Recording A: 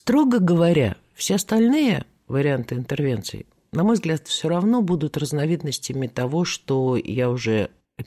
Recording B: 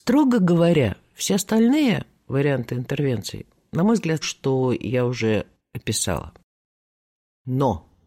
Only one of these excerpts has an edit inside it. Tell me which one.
B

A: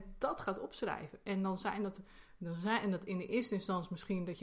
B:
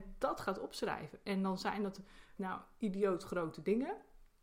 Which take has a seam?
B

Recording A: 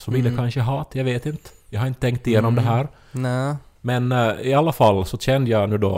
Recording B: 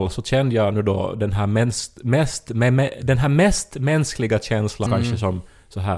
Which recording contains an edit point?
B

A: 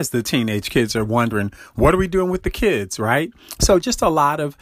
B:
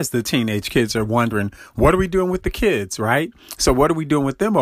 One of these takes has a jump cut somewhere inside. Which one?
A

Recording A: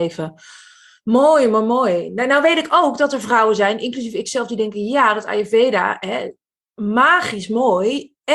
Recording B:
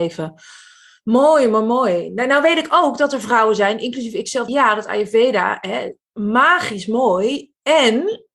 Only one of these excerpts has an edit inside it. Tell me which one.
B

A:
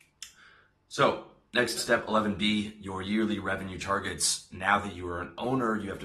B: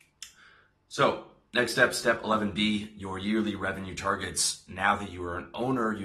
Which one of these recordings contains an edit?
A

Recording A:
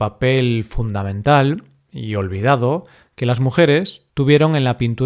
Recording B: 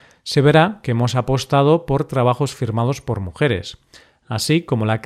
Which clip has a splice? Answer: A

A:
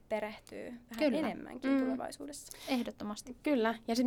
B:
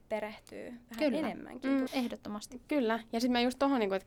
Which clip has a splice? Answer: B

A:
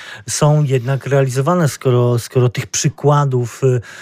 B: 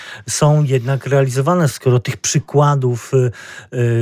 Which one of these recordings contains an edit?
B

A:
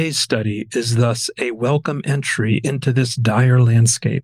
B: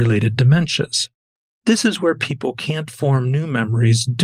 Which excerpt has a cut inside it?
B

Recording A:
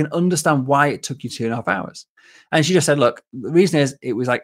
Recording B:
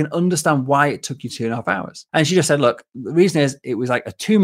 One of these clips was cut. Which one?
B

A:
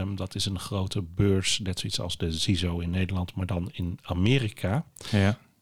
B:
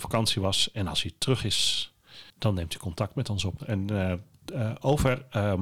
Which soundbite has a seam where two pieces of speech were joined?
B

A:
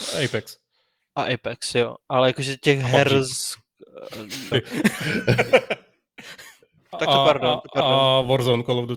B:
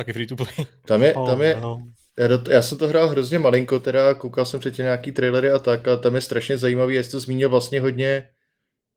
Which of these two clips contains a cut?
A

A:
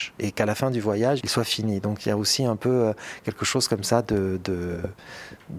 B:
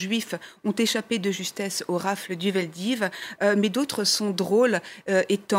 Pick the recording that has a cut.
A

